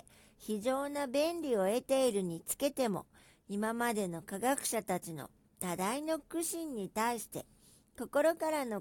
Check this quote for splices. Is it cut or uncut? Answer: uncut